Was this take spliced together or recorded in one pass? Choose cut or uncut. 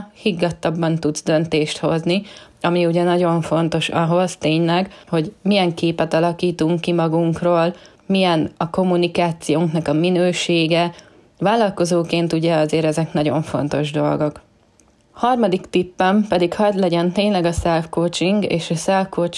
uncut